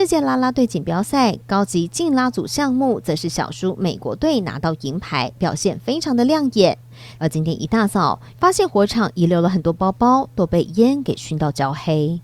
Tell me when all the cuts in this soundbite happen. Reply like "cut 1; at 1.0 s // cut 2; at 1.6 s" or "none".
cut 1; at 7.2 s // cut 2; at 8.3 s